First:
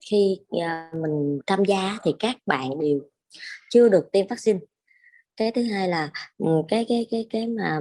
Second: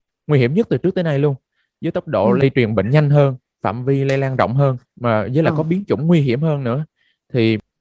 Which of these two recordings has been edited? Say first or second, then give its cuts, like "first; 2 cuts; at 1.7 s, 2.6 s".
second; 1 cut; at 4.8 s